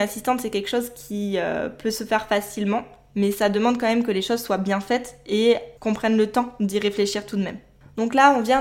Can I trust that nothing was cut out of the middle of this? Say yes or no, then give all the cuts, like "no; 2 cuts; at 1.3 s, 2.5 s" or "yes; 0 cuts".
no; 1 cut; at 5.8 s